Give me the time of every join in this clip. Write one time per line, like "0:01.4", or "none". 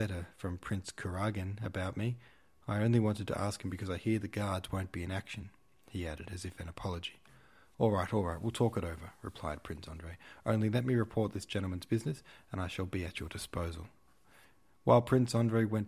none